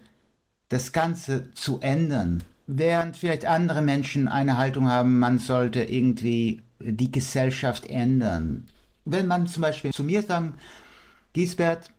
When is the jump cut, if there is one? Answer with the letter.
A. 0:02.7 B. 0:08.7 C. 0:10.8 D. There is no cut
A